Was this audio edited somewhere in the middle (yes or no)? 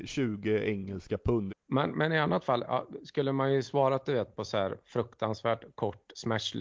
yes